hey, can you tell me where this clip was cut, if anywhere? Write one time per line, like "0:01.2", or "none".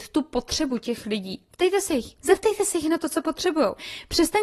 0:02.2